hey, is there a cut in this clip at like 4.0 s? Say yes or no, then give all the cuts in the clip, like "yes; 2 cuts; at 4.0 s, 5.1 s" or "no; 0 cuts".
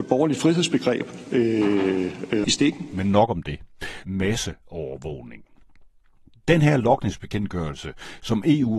yes; 2 cuts; at 2.4 s, 4.0 s